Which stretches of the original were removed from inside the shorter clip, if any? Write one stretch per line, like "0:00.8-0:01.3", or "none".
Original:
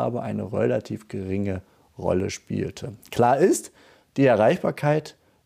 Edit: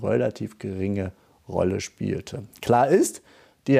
none